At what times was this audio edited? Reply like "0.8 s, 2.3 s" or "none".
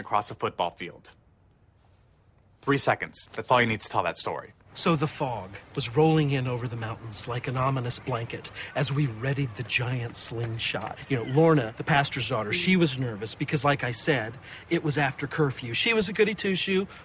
none